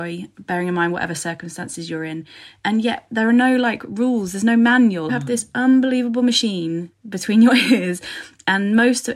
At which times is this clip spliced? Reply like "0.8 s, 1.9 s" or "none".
5.1 s